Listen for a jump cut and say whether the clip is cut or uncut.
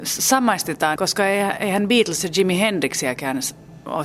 cut